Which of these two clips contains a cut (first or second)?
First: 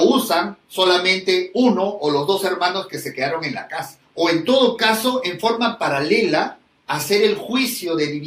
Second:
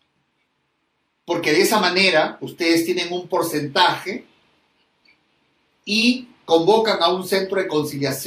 first